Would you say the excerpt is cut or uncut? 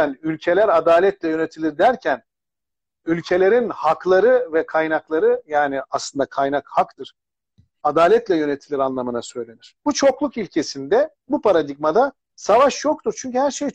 uncut